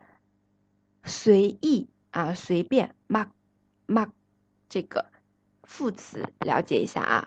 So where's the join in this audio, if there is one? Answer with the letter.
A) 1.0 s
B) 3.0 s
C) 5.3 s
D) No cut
D